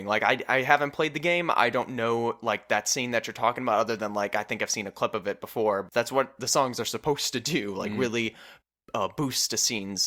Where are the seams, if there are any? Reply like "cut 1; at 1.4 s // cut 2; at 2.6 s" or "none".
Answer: cut 1; at 5.9 s